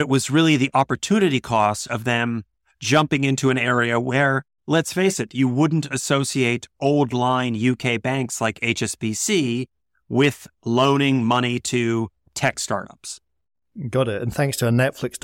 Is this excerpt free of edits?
yes; 0 cuts

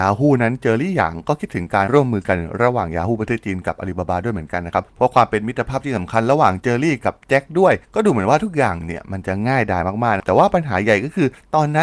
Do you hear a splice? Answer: yes; 1 cut; at 1.9 s

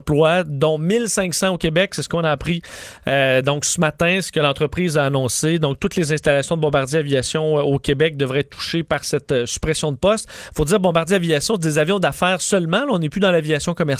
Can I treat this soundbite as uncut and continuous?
yes; 0 cuts

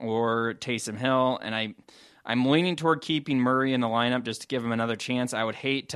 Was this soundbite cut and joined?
no; 0 cuts

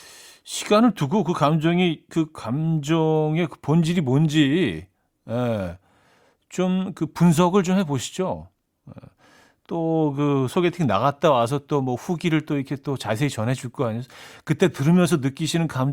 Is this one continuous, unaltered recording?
yes; 0 cuts

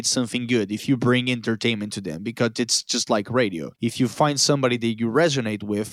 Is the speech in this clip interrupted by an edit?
no; 0 cuts

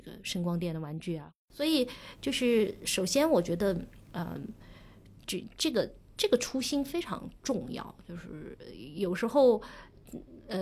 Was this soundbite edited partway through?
no; 0 cuts

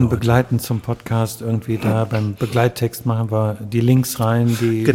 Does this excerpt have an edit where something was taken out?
no; 0 cuts

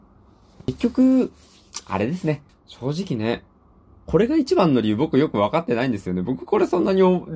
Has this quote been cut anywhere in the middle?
yes; 1 cut; at 2.5 s

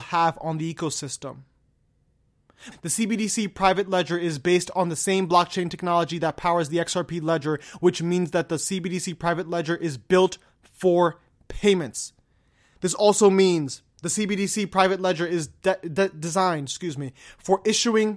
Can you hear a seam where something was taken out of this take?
yes; 1 cut; at 2.7 s

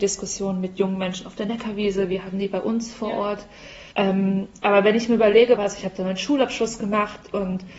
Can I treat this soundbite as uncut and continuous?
no; 2 cuts; at 3.9 s, 5.6 s

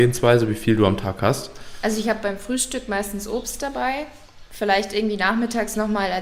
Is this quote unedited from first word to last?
yes; 0 cuts

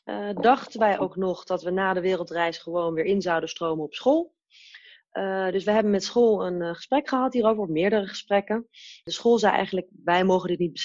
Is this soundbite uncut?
yes; 0 cuts

